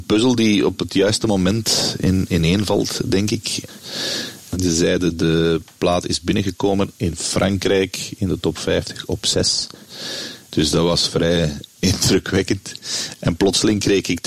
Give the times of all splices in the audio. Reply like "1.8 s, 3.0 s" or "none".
4.5 s, 10.5 s